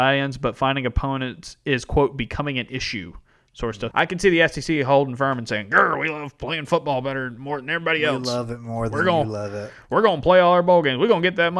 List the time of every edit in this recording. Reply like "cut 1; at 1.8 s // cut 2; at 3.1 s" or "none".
cut 1; at 3.9 s